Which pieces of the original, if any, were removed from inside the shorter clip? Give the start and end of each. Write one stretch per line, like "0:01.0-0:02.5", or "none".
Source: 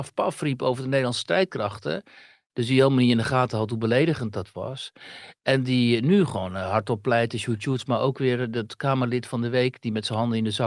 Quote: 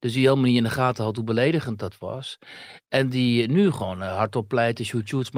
none